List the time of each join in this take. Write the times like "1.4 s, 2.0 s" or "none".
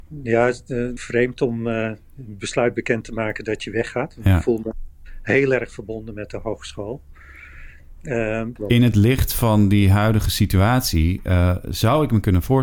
1.0 s, 8.6 s

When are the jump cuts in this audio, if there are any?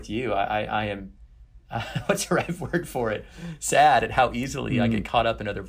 none

